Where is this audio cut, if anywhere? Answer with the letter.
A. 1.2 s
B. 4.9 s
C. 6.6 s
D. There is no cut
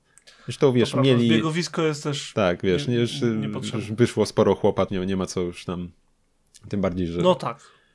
B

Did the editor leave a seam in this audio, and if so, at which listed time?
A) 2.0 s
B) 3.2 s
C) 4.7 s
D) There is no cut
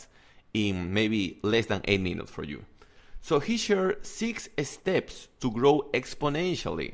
D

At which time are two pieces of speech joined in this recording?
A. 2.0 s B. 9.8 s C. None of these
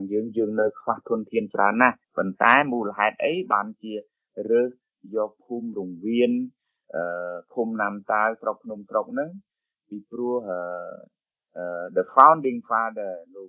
A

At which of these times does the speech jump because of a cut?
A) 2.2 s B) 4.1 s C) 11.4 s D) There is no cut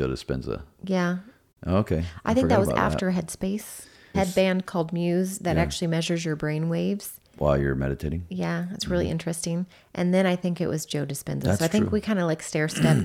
B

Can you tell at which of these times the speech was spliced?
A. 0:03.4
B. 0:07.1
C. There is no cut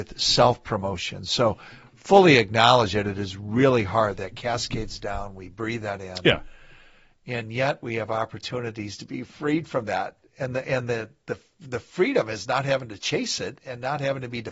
C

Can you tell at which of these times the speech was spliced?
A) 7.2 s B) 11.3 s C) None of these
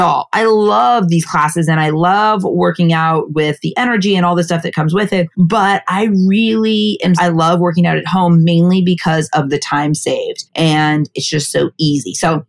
A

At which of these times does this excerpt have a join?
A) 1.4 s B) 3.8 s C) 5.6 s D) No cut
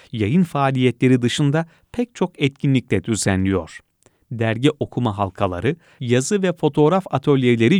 D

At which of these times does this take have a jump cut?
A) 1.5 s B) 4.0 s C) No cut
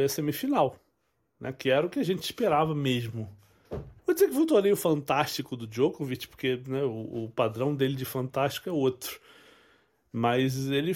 B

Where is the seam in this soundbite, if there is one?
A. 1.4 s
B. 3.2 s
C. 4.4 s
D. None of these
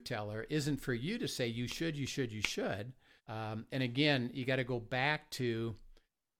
B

